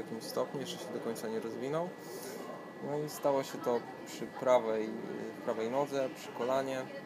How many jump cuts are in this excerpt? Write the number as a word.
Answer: zero